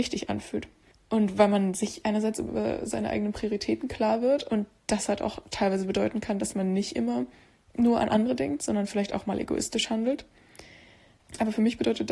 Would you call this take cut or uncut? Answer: cut